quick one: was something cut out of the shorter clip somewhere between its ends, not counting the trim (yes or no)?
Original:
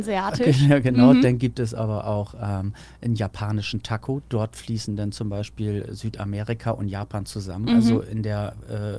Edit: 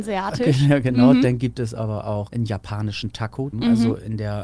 yes